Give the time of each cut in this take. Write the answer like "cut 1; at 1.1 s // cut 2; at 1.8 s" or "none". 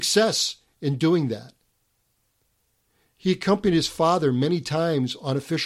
none